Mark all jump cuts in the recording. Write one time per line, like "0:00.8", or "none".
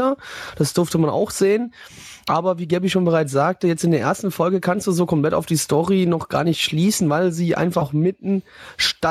none